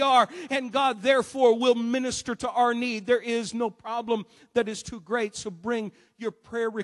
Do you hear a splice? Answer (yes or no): no